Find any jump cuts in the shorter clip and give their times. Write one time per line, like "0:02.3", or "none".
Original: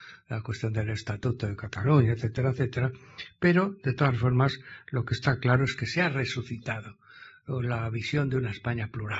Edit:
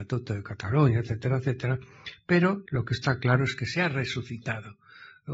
0:02.7